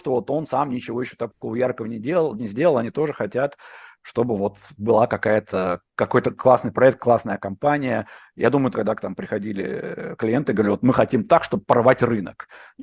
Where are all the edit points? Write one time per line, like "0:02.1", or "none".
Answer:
0:08.7